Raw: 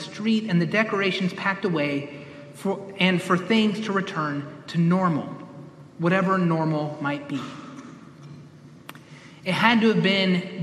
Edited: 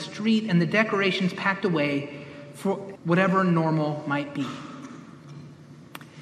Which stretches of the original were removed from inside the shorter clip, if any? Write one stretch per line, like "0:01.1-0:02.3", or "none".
0:02.9-0:05.9